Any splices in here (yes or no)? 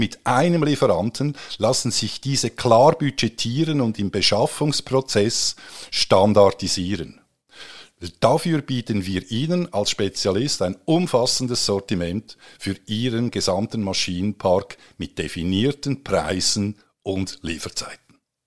no